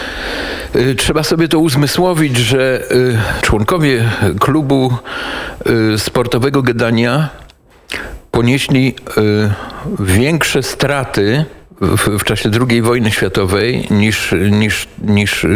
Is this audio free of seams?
no; 1 cut; at 3.4 s

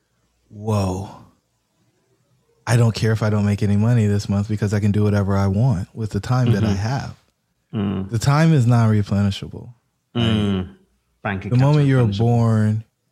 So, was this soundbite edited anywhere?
no; 0 cuts

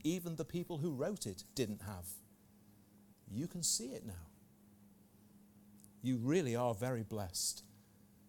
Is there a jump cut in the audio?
no; 0 cuts

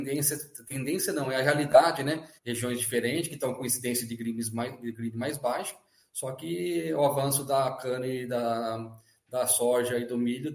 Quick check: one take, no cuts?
no; 1 cut; at 2.4 s

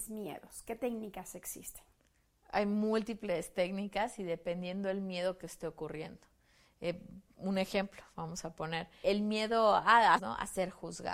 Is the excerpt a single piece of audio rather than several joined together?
no; 2 cuts; at 9.0 s, 10.2 s

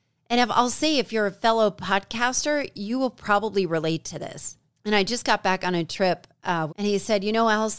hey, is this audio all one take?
no; 2 cuts; at 4.7 s, 6.7 s

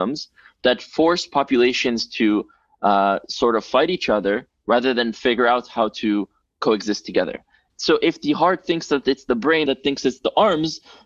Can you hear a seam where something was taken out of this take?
yes; 2 cuts; at 7.7 s, 9.7 s

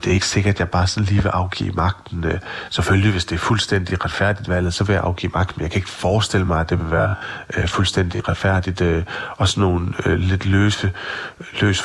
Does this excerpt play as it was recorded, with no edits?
yes; 0 cuts

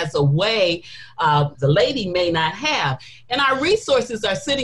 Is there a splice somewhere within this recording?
yes; 1 cut; at 1.5 s

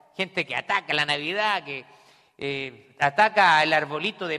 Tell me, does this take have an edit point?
no; 0 cuts

